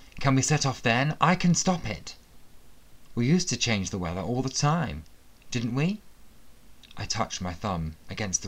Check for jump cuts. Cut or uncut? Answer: uncut